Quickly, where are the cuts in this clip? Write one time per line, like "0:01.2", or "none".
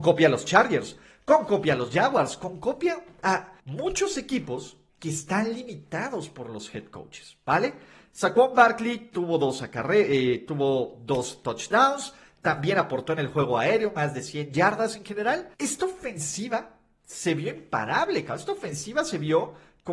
0:03.6
0:15.5